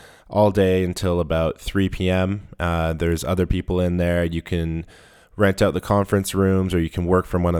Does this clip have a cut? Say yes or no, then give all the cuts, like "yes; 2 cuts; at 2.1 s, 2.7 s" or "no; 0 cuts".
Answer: no; 0 cuts